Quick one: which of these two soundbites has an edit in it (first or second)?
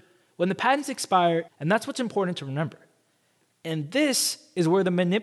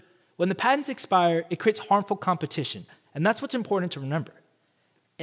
first